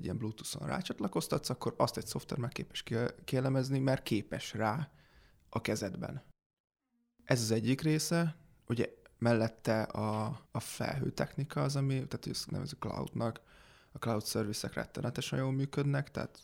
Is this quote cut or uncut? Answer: cut